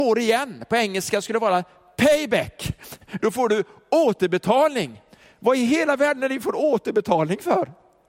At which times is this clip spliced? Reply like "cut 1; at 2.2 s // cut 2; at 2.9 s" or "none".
cut 1; at 3.2 s